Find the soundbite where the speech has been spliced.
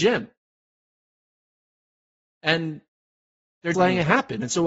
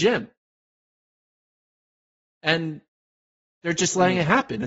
first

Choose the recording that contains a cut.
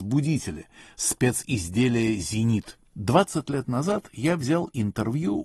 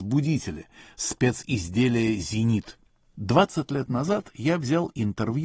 first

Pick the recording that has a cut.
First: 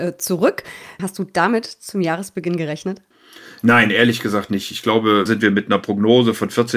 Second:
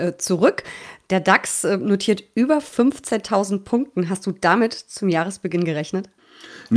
first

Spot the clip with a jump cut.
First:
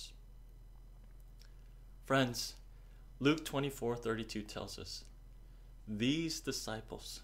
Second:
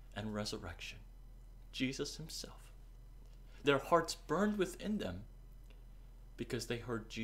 second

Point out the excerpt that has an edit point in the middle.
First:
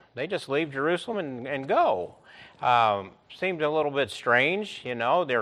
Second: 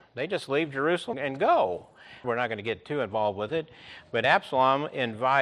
second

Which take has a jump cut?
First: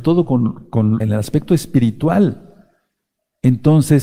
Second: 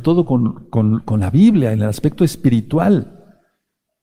first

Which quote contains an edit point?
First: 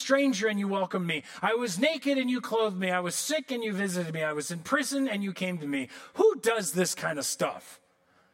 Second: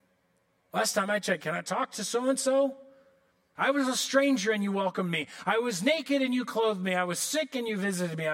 second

